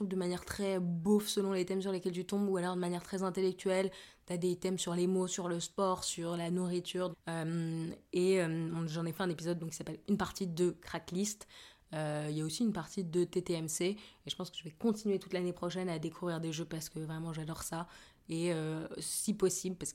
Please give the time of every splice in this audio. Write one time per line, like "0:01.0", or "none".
0:07.1